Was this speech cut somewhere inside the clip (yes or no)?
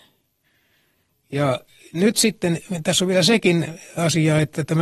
no